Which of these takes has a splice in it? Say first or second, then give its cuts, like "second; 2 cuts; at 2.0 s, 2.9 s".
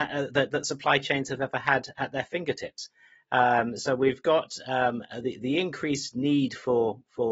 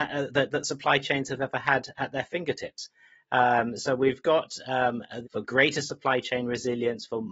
second; 1 cut; at 5.2 s